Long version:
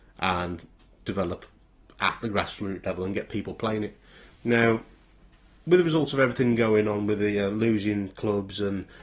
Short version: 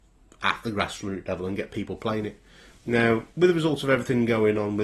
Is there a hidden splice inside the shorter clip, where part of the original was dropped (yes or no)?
yes